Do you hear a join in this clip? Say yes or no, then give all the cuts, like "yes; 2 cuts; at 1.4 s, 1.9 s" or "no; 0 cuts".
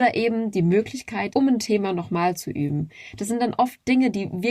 yes; 1 cut; at 1.3 s